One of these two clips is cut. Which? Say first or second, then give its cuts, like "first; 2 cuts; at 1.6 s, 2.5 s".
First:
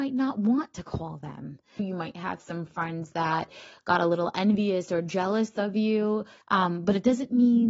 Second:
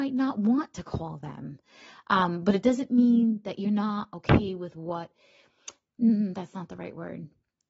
first; 2 cuts; at 1.8 s, 6.4 s